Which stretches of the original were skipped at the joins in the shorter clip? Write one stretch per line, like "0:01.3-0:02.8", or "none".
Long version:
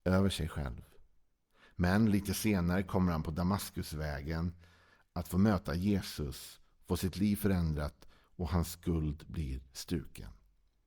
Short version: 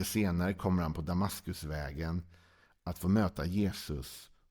none